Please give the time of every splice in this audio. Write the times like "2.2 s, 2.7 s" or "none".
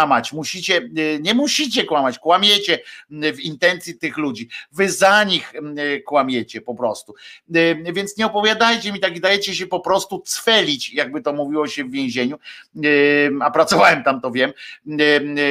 4.0 s